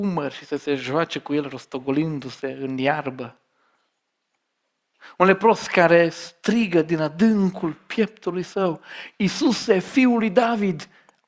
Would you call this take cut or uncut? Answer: uncut